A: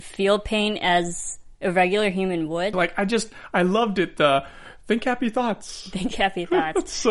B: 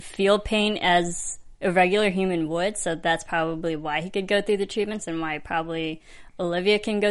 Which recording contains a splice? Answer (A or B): A